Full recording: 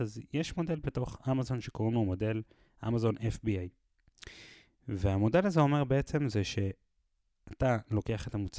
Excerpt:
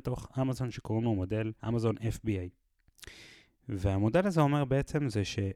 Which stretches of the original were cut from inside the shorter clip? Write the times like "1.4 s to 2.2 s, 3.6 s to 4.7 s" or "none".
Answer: 2.5 s to 2.8 s